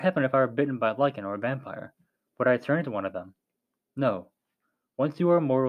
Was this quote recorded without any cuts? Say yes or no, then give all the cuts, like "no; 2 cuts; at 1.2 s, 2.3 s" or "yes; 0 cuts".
yes; 0 cuts